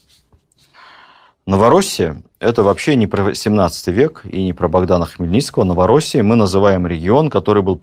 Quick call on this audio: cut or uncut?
uncut